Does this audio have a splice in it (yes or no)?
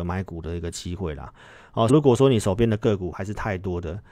yes